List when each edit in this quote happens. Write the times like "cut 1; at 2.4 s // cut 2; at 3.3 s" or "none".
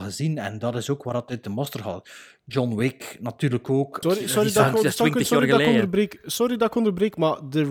cut 1; at 4.0 s

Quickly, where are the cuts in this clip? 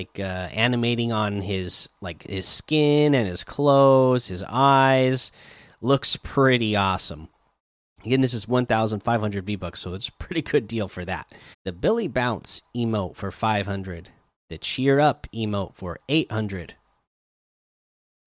cut 1; at 11.5 s

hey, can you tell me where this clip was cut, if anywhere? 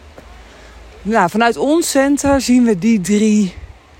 cut 1; at 0.9 s

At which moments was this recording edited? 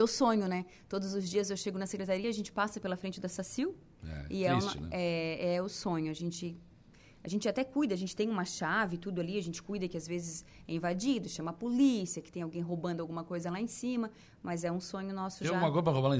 none

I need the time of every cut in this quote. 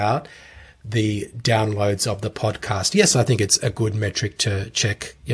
none

